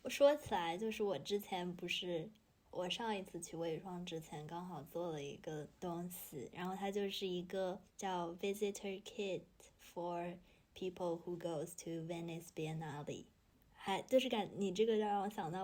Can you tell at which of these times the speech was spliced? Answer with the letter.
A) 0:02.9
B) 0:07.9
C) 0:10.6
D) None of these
B